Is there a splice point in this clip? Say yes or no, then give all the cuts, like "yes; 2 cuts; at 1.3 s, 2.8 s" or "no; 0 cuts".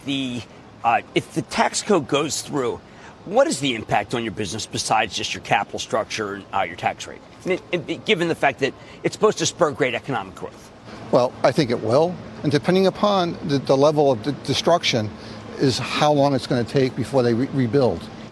yes; 2 cuts; at 12.4 s, 13.6 s